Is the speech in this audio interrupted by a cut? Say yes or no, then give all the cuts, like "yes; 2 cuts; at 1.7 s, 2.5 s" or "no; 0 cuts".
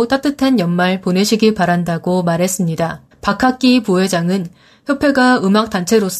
yes; 1 cut; at 3.1 s